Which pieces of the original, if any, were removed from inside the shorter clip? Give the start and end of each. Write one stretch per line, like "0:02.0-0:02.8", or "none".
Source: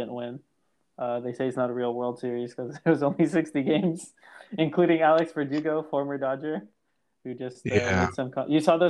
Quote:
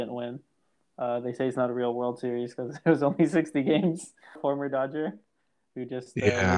0:04.4-0:05.8

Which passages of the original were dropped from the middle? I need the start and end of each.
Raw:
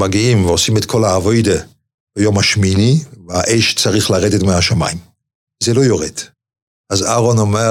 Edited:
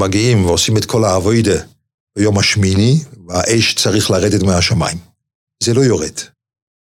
none

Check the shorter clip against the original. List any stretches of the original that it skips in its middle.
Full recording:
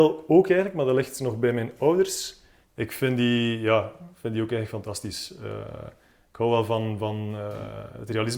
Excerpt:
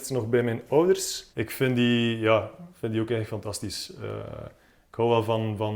0:02.4-0:02.7

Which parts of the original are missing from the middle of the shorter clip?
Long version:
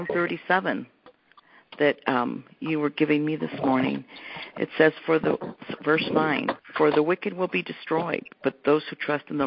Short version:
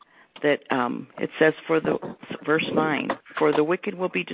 0:02.5-0:04.5

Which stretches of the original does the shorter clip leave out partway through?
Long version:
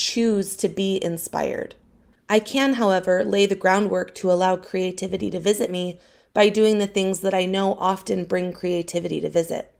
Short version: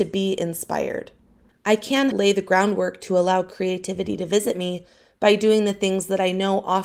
0:02.7-0:03.2

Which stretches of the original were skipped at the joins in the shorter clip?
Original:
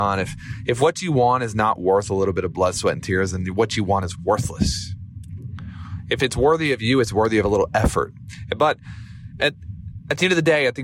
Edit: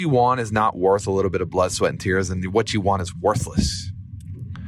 none

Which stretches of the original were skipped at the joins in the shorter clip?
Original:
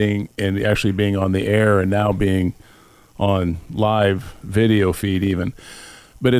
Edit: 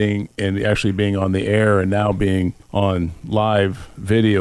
0:02.6-0:03.1

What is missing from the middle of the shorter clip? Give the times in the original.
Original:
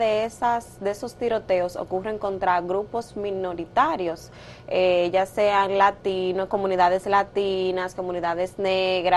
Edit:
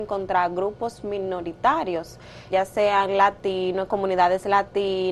0:04.6-0:05.1

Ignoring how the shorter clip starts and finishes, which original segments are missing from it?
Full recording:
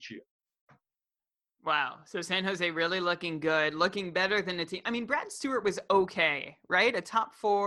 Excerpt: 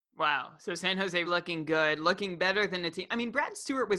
0:02.7-0:03.0

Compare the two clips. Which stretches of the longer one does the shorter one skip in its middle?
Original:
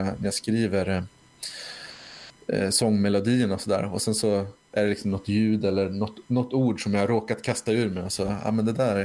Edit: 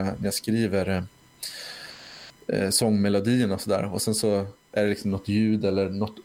none

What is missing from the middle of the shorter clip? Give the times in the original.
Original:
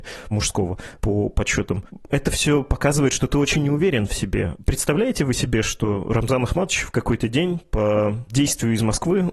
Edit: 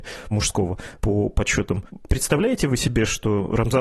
0:02.1-0:04.6

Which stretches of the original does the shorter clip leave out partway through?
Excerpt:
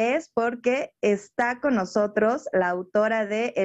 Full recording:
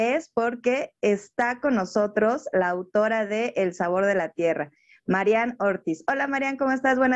none

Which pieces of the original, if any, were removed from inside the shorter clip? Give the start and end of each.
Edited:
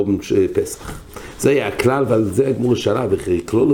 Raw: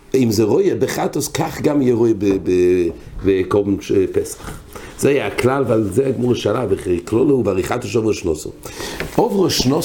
none

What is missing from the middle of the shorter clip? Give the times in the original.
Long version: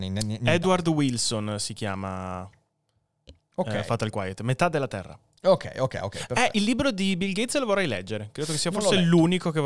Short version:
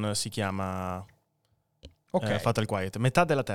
none

